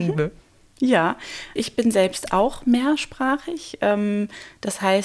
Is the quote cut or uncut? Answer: cut